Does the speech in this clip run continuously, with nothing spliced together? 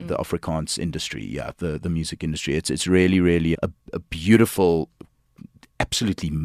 no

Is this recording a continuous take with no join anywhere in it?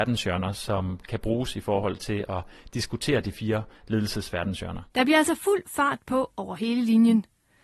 no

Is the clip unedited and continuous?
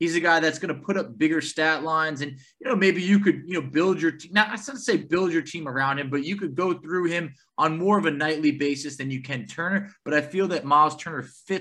yes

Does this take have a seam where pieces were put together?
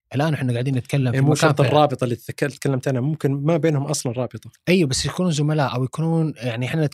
no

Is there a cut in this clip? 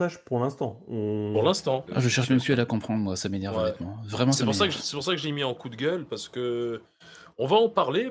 yes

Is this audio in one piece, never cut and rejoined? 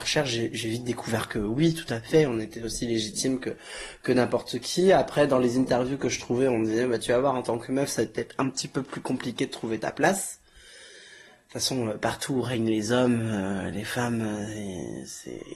yes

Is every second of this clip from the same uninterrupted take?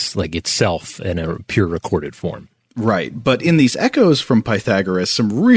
yes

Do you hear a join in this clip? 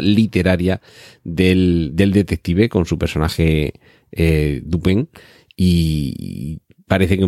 no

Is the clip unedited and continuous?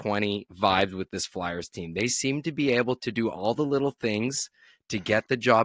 yes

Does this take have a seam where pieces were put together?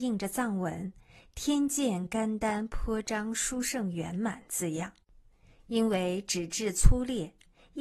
no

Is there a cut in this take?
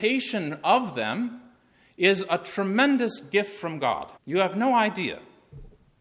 yes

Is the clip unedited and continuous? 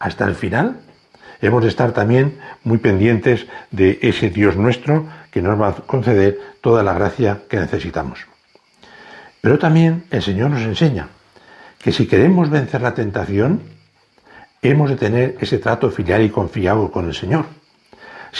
no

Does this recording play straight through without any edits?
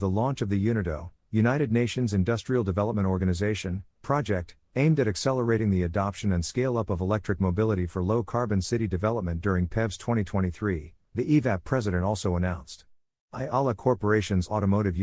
yes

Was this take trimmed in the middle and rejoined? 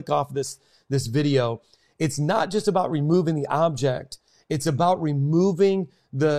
no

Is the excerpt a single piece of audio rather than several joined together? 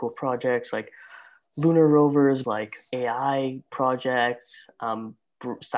no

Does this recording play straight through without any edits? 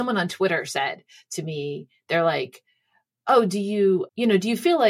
yes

